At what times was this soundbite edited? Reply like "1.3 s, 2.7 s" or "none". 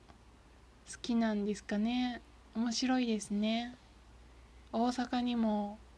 4.7 s